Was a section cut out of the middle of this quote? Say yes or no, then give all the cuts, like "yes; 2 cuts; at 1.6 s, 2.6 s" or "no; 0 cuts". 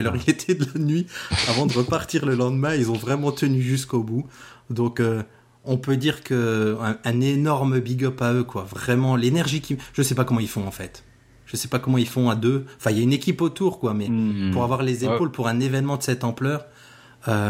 no; 0 cuts